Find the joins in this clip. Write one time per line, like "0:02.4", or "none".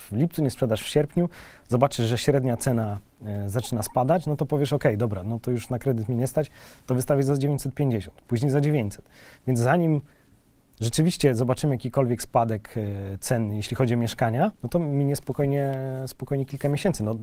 0:14.6